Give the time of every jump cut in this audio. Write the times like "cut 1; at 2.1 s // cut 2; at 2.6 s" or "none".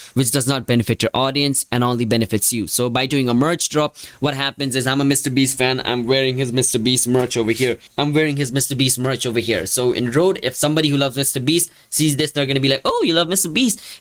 none